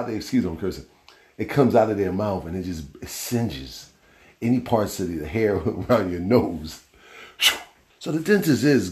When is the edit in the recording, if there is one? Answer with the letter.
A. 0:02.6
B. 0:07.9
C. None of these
B